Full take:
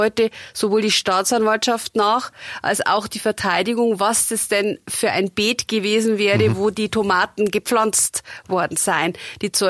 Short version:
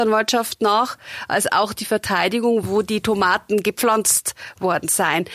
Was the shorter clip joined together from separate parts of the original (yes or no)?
yes